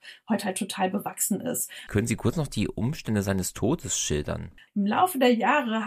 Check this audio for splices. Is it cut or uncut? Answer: cut